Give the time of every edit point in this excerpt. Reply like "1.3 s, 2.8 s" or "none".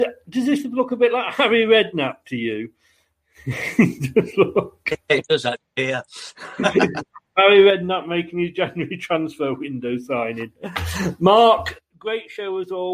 none